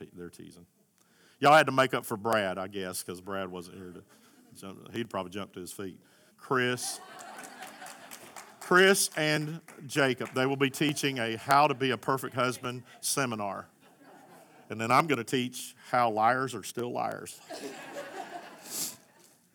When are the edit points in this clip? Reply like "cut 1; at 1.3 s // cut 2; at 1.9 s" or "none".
cut 1; at 6.3 s